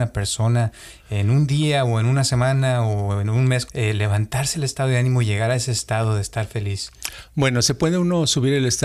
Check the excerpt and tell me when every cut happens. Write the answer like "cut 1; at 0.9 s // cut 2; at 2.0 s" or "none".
cut 1; at 3.7 s